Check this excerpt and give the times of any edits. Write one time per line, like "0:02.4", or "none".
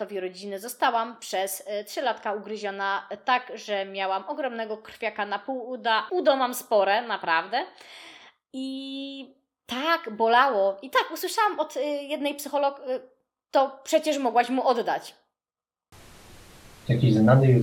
0:06.1